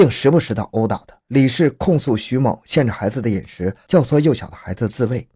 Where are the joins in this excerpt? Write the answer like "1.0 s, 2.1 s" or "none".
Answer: 1.2 s